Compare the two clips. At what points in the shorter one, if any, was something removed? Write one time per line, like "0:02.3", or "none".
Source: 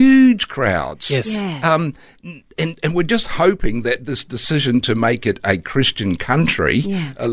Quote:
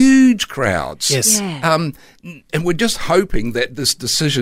0:02.5